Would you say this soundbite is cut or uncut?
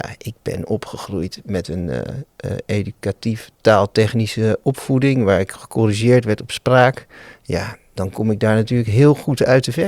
uncut